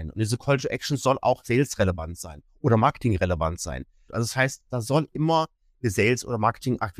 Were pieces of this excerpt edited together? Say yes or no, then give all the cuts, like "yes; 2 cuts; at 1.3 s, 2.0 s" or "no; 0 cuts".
yes; 1 cut; at 4.1 s